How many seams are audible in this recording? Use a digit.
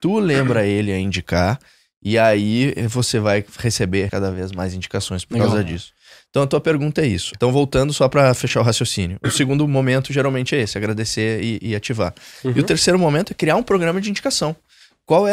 2